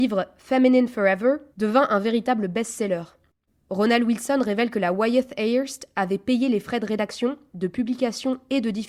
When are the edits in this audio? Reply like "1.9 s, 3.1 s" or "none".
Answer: 1.5 s, 3.5 s